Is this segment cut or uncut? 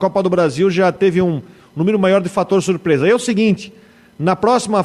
uncut